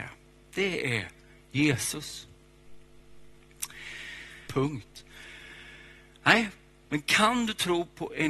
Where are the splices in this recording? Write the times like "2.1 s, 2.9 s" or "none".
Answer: 4.5 s